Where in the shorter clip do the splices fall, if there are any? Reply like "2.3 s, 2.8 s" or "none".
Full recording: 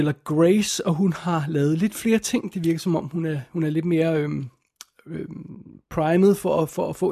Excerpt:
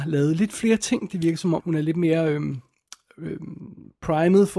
1.6 s